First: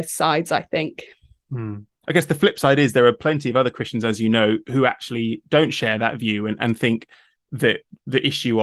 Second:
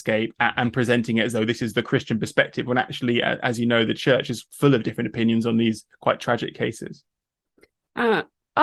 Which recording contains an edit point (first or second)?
first